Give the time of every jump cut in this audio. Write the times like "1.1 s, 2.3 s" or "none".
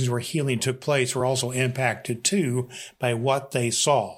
none